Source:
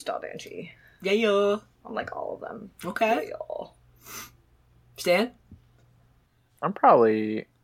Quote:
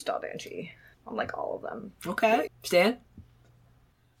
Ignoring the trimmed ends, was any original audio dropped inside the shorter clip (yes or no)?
yes